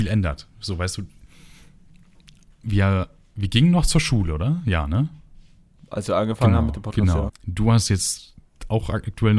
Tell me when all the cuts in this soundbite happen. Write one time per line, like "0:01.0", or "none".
0:07.3